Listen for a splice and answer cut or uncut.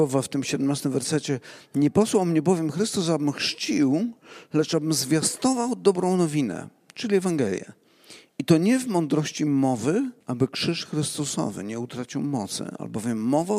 cut